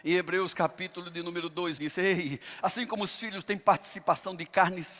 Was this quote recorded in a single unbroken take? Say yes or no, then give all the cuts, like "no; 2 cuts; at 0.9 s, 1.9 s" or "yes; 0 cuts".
no; 1 cut; at 1.8 s